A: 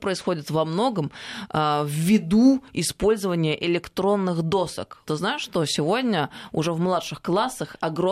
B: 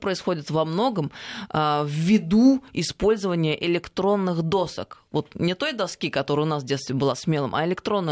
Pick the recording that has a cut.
A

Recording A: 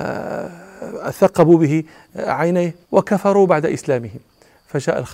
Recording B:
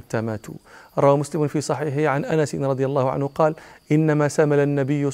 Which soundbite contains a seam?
A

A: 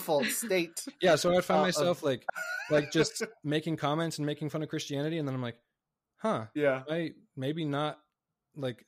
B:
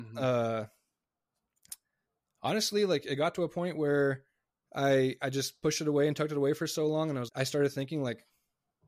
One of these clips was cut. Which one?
B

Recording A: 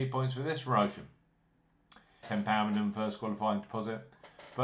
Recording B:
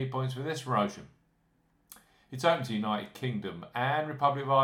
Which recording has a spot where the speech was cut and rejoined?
A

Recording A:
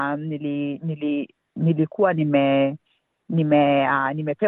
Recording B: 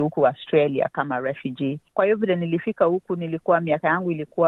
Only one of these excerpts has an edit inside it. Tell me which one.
B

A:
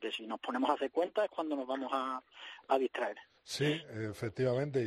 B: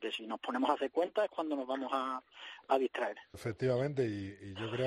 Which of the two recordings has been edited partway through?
B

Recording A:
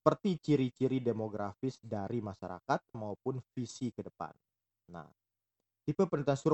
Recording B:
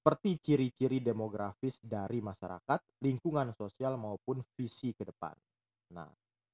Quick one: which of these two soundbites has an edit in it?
A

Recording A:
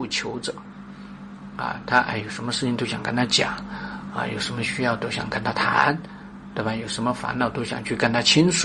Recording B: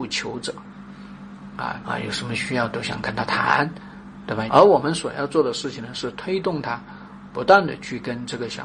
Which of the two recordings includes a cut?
B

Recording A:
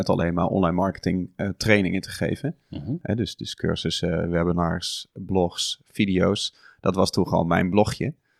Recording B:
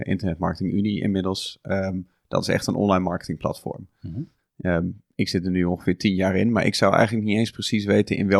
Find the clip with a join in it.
B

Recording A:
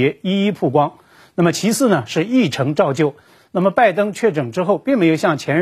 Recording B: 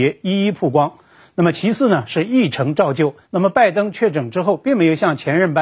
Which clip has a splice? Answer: B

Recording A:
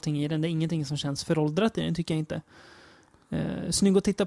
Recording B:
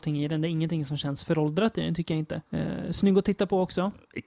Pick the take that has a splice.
B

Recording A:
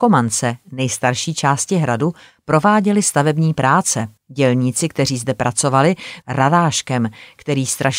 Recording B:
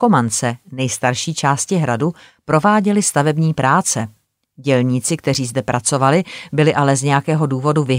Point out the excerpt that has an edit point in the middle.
A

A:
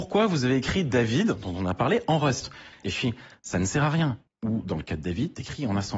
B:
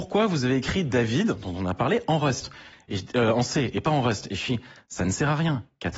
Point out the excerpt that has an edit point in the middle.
A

